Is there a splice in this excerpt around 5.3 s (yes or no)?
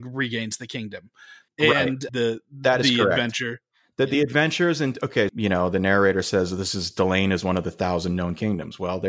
yes